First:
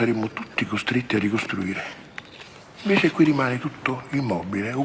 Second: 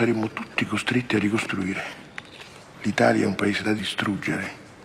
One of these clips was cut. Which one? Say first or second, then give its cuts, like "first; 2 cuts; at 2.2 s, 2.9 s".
second; 1 cut; at 2.7 s